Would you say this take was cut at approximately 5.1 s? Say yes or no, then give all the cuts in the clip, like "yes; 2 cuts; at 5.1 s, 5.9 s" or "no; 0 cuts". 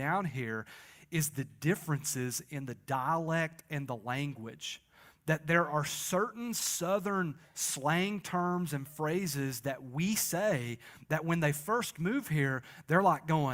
no; 0 cuts